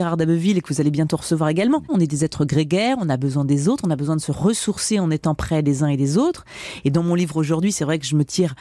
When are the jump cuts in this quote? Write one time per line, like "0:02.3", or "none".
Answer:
0:01.9